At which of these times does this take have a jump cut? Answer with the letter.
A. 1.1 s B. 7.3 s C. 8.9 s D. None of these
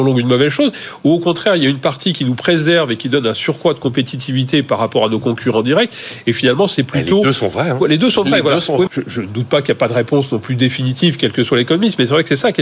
C